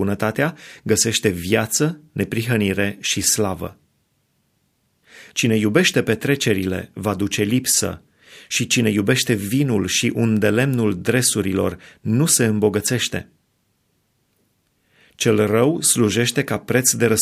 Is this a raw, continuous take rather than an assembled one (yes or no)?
no